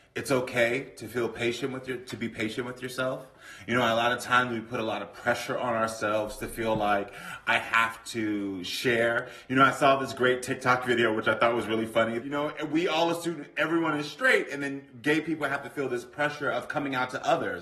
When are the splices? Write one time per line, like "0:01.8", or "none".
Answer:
0:12.2